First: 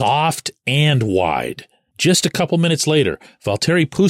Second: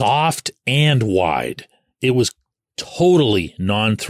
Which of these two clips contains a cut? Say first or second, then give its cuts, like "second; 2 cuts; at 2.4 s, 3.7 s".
first; 1 cut; at 1.9 s